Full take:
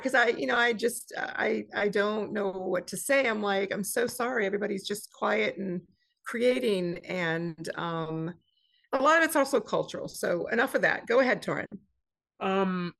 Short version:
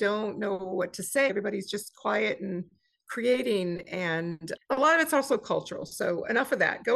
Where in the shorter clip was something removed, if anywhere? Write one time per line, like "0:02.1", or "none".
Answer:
0:01.3
0:04.6